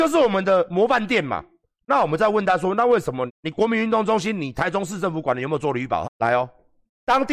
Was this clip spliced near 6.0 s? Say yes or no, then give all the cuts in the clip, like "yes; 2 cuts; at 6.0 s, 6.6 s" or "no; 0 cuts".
yes; 2 cuts; at 3.3 s, 6.0 s